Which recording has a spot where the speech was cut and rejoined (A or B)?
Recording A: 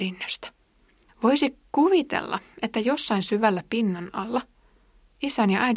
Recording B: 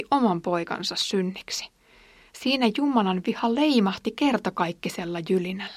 A